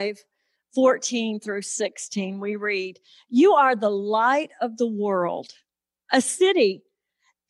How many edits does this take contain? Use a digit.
0